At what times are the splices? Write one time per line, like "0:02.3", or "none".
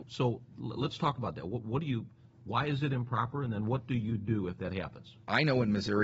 none

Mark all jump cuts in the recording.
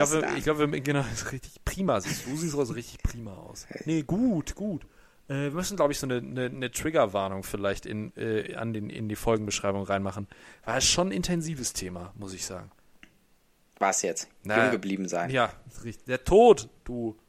none

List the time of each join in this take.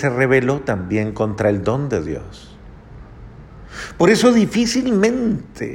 none

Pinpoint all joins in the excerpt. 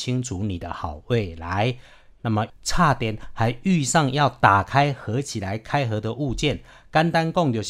0:02.2

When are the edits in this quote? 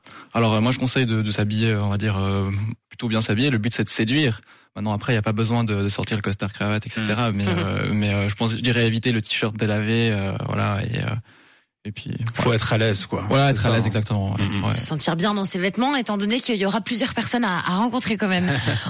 none

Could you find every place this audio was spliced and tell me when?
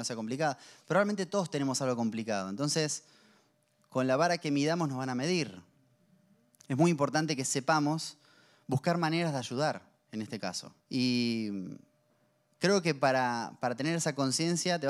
0:10.8

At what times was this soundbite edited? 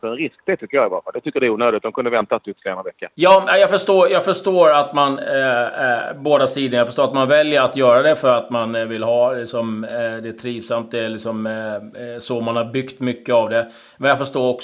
0:03.1

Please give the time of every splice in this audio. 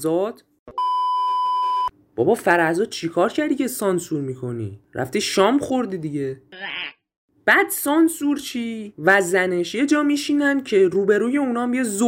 none

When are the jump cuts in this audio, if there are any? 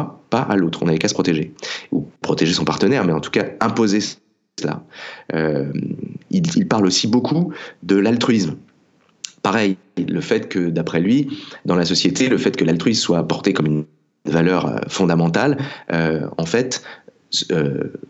none

